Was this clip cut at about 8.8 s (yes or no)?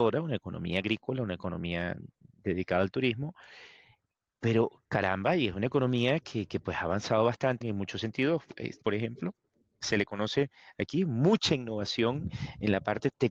yes